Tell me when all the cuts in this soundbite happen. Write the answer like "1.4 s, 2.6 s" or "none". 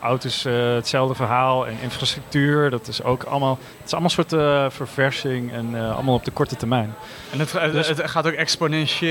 none